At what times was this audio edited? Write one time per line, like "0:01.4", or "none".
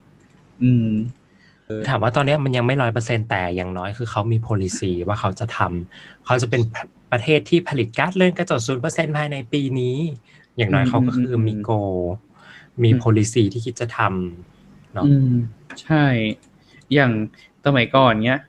0:01.7